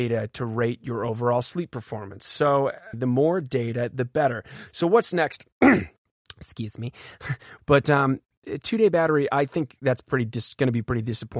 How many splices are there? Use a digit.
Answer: 2